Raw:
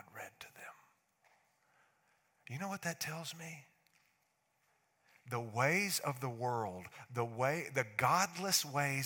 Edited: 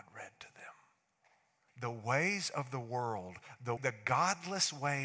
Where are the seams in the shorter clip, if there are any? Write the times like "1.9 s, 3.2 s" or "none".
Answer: 1.7 s, 3.8 s